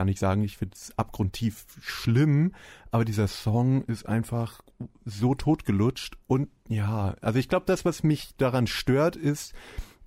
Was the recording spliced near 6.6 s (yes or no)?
yes